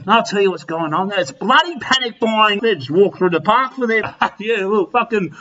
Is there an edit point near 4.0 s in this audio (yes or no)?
yes